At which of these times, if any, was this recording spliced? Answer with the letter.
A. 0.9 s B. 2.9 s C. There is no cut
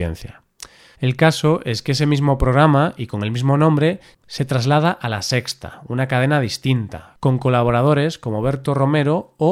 A